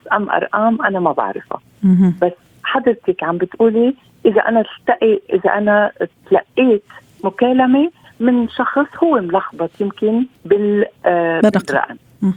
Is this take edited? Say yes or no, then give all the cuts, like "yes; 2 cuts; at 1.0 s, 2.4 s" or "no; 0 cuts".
yes; 1 cut; at 10.3 s